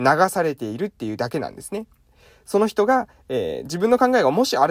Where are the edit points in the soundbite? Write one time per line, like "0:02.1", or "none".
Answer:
none